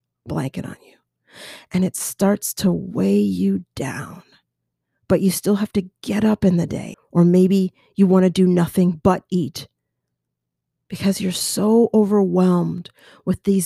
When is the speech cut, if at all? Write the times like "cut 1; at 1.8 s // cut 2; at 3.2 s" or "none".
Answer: cut 1; at 6.9 s